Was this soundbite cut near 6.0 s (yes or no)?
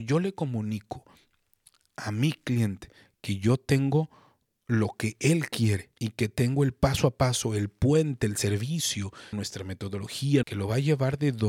yes